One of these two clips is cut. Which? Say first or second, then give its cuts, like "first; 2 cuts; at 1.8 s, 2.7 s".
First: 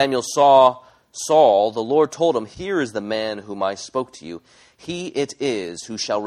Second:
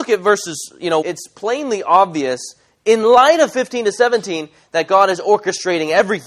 second; 1 cut; at 1.0 s